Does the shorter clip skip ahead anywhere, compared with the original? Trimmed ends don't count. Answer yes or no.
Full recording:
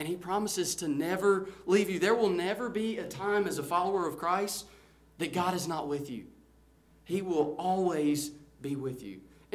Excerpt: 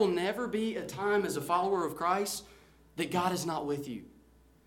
no